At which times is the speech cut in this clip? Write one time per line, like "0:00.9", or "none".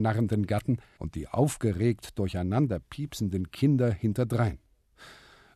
0:01.0